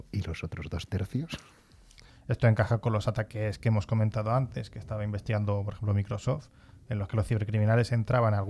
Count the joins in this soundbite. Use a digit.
1